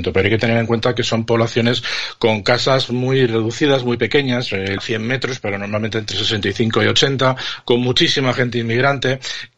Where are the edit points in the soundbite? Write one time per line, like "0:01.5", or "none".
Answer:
0:04.8